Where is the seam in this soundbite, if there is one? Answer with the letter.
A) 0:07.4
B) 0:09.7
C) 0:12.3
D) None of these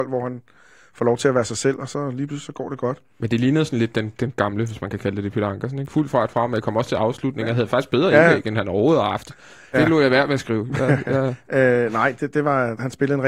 B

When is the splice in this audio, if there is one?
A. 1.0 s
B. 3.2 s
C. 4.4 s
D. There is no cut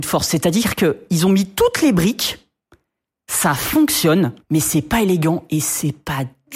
C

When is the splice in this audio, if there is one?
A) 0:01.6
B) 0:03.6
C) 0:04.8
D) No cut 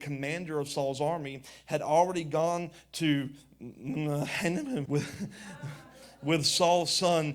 C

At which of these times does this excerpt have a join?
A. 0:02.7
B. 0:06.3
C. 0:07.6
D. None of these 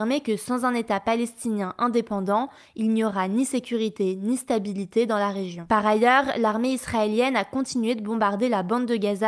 D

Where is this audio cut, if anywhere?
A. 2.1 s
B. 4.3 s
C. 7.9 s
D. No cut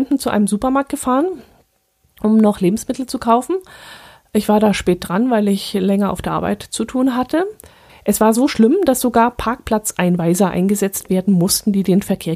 C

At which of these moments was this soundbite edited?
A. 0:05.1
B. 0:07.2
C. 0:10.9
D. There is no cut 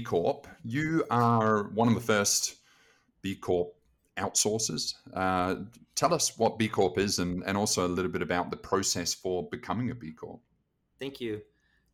C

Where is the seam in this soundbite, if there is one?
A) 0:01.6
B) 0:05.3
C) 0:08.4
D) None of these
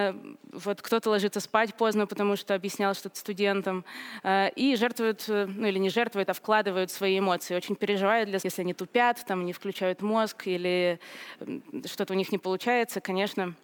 C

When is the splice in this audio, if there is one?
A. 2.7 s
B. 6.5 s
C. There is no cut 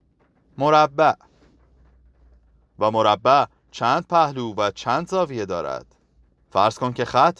B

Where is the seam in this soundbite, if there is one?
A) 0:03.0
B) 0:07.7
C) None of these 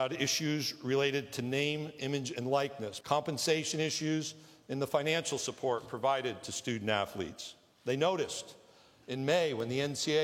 A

